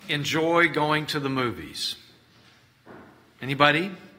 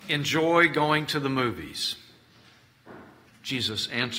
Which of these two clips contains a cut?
second; 1 cut; at 3.3 s

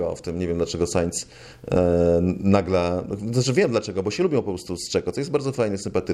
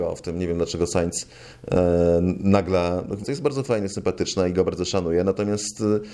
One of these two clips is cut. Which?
second; 1 cut; at 3.2 s

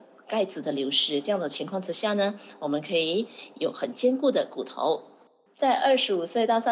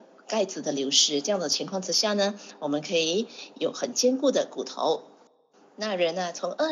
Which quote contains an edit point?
first; 1 cut; at 5.5 s

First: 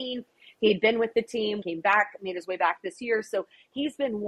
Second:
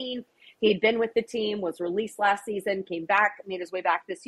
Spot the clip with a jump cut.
first; 1 cut; at 1.6 s

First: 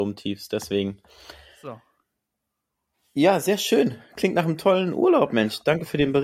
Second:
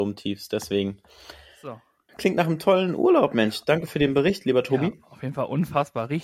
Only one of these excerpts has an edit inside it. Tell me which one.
second; 1 cut; at 2.1 s

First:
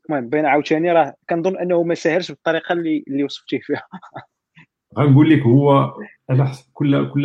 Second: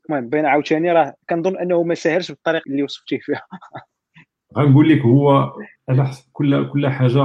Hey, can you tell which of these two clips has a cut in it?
second; 1 cut; at 2.6 s

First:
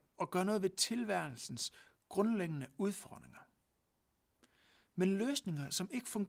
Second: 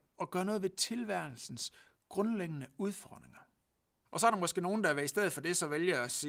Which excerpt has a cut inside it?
second; 1 cut; at 4.0 s

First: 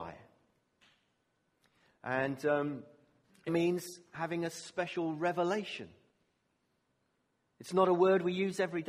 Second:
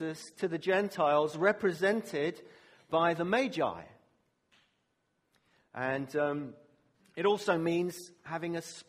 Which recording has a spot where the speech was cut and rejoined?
first; 1 cut; at 3.5 s

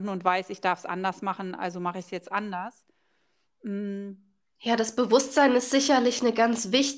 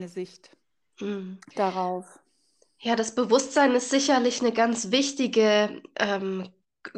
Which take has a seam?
first; 1 cut; at 4.6 s

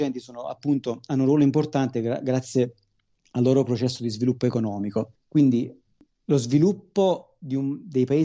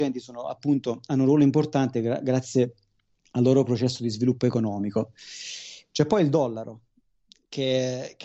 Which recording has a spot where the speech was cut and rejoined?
first; 1 cut; at 5.1 s

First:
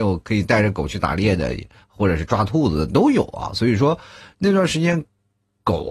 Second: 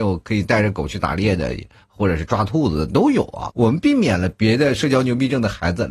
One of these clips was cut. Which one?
second; 1 cut; at 3.5 s

